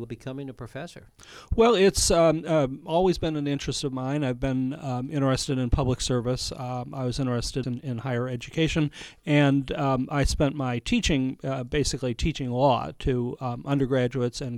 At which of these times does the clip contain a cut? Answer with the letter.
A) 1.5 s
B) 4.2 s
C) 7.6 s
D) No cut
C